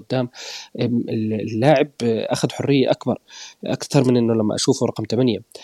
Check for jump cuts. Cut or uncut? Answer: uncut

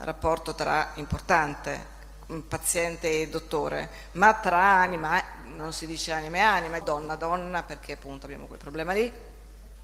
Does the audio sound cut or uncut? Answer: cut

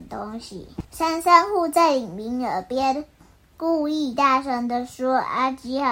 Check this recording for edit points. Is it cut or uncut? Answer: uncut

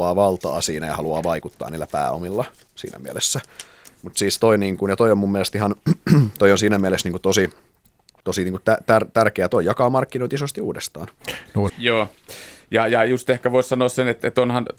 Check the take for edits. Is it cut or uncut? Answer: cut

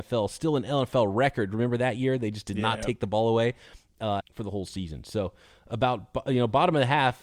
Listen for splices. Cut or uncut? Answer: cut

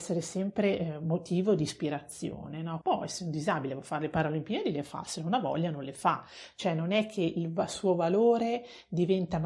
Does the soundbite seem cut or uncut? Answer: cut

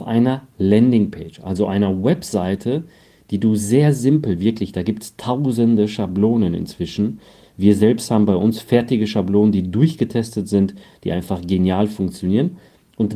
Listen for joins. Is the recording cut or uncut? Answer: uncut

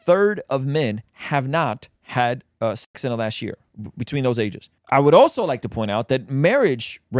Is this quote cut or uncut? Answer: uncut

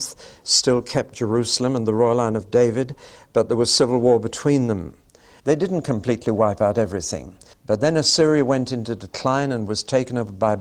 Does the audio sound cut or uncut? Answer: cut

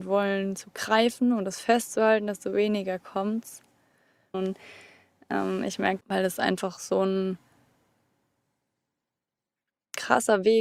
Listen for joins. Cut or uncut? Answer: cut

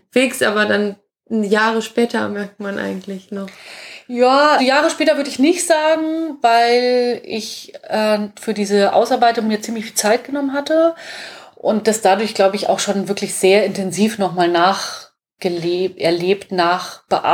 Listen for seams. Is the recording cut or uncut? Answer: cut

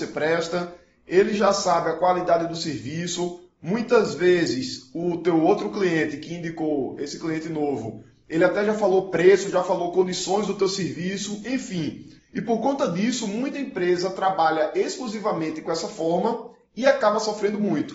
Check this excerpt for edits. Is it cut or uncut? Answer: cut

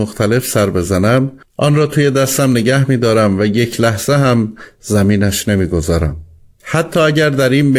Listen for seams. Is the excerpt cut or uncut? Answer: cut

